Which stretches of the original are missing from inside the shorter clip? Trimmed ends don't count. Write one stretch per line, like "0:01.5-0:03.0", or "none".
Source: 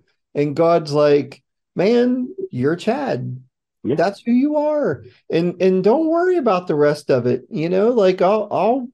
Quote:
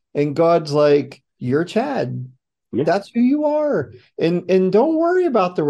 0:01.6-0:02.5